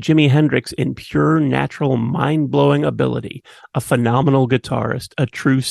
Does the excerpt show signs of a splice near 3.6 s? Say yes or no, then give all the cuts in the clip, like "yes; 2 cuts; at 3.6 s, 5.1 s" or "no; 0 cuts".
no; 0 cuts